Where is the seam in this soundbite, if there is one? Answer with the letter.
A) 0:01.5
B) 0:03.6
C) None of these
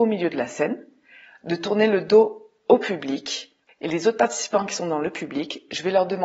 B